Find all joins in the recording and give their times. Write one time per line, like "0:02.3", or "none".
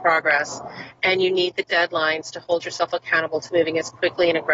none